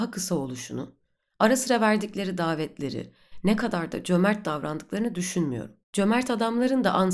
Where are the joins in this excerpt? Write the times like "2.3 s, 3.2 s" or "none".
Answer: 5.8 s

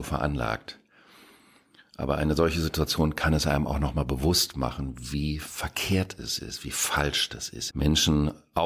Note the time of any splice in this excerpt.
7.7 s

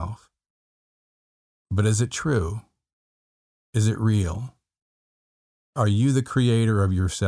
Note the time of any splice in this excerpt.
none

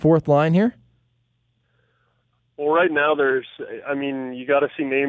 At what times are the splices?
none

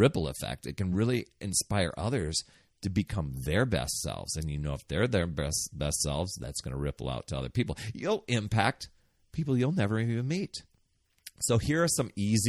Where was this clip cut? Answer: none

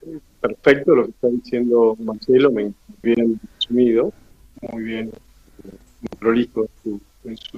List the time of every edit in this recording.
3.0 s

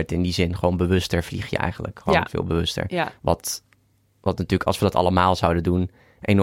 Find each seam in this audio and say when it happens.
none

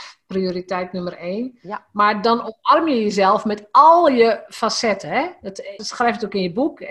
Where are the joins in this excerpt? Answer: 5.8 s

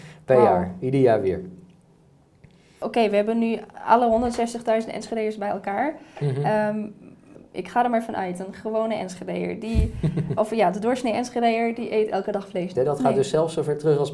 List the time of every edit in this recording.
10.4 s, 12.7 s

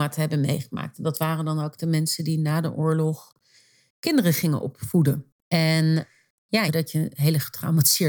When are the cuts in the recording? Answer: 5.4 s, 6.7 s

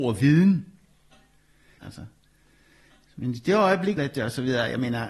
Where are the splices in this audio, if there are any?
1.8 s, 4.0 s

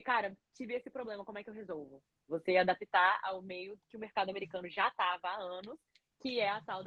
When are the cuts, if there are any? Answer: 2.3 s

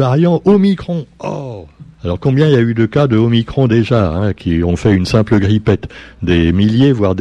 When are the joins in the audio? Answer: 1.9 s

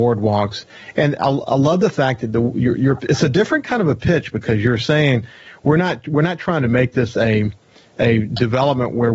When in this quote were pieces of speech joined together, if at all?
none

